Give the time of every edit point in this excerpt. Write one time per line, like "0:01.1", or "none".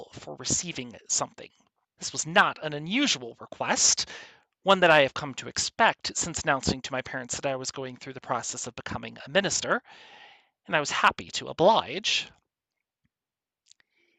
0:01.8